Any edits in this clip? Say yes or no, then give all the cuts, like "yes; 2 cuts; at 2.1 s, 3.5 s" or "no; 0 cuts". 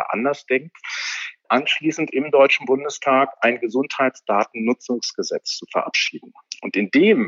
yes; 1 cut; at 1.4 s